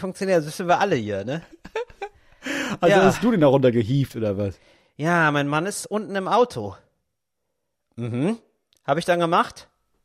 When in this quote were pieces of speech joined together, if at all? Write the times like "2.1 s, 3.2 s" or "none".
none